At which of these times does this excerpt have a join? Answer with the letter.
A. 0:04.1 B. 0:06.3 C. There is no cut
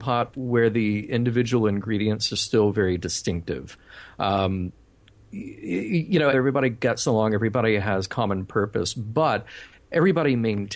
B